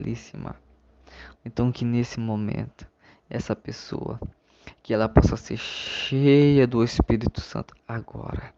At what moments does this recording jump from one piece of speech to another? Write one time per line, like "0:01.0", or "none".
0:01.3